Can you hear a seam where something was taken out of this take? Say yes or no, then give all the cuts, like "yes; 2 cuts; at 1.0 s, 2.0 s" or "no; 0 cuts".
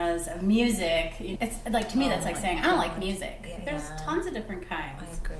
yes; 2 cuts; at 1.4 s, 3.6 s